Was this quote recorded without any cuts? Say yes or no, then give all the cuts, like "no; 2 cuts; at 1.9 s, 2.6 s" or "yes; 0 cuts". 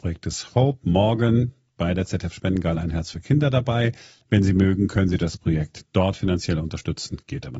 yes; 0 cuts